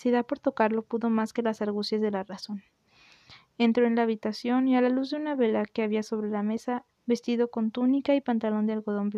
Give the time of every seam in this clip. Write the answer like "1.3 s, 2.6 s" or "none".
6.9 s